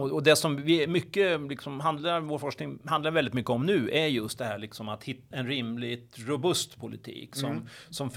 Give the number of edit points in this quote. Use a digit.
1